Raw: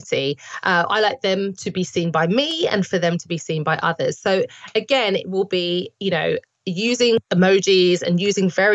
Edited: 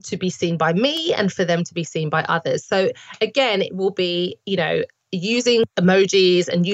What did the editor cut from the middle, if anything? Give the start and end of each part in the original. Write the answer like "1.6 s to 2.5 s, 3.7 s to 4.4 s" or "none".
none